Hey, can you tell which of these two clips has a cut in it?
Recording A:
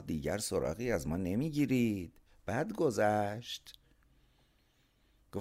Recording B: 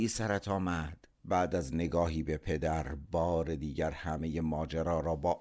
B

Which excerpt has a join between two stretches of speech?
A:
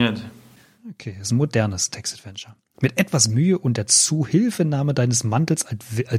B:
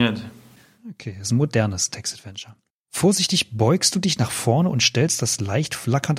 B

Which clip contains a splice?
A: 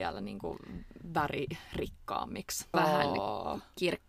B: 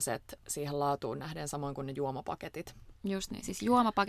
A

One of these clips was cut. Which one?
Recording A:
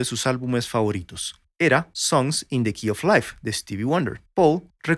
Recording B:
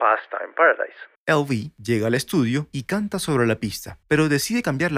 B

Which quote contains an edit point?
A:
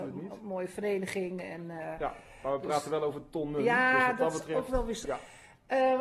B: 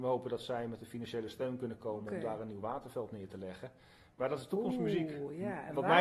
A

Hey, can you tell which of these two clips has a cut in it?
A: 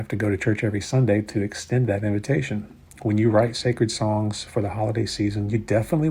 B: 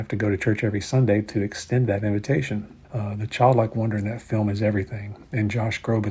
B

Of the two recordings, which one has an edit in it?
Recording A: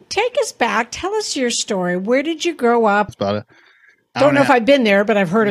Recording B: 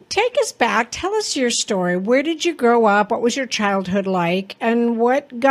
A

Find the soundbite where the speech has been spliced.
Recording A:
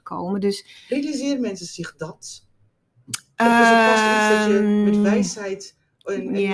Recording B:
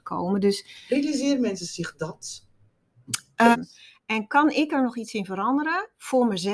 B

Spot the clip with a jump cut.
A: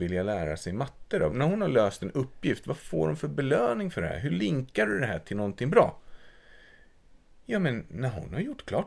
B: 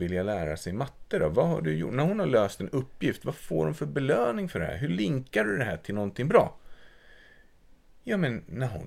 A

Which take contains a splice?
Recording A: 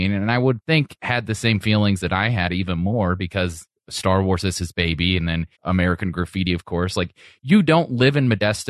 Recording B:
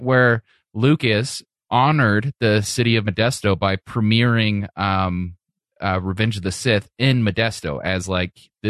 A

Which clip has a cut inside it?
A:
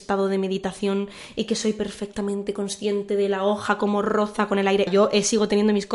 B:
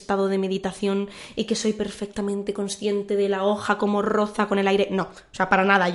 A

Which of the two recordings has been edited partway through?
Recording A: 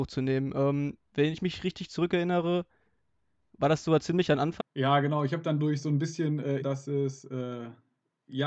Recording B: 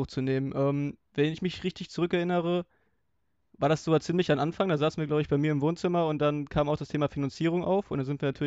A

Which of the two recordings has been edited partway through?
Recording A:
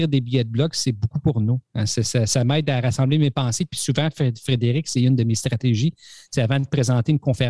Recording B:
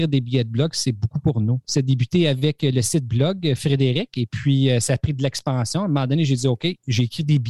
B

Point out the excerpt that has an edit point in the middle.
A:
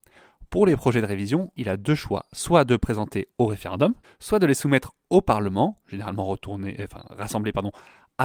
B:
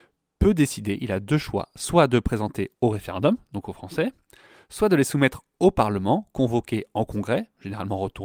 A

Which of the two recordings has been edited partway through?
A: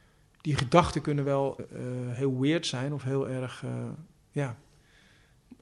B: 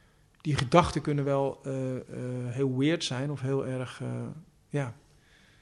A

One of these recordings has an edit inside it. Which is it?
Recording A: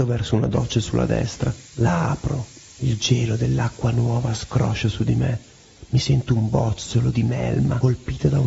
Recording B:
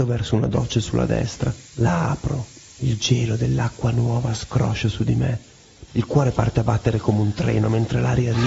B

